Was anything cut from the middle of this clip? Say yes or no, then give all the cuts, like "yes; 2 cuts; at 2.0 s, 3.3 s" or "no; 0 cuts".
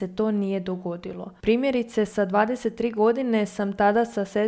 no; 0 cuts